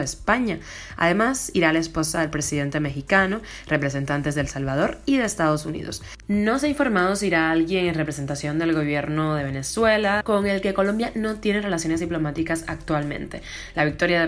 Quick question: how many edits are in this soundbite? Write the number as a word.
one